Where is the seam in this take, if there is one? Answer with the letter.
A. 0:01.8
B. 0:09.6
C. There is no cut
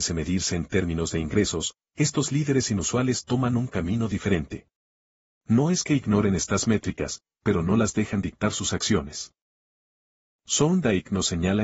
A